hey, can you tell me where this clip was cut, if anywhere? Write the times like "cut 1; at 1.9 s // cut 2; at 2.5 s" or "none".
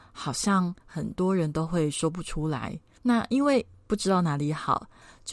none